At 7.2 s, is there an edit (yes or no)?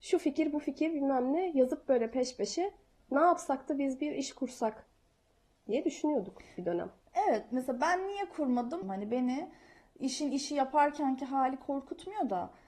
no